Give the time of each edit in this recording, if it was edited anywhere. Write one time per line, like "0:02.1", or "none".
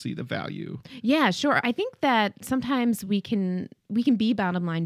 none